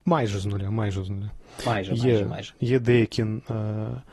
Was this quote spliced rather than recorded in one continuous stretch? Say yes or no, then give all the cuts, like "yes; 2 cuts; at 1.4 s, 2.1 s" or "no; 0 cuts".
no; 0 cuts